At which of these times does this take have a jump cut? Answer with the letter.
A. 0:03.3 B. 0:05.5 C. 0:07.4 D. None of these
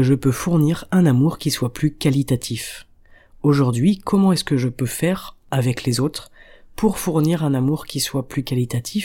B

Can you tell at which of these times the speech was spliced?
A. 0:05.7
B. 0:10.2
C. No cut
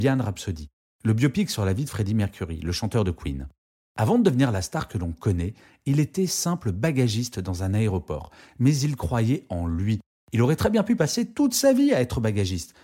C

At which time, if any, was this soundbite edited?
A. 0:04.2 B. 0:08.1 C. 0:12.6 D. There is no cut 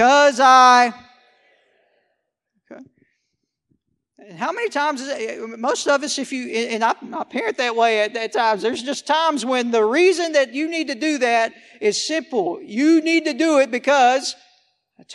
D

